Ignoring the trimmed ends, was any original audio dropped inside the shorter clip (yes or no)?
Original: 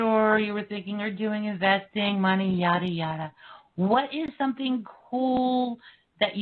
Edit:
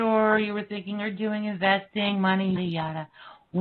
yes